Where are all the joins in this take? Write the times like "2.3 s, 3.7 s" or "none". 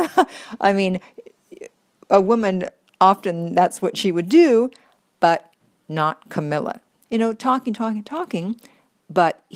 7.1 s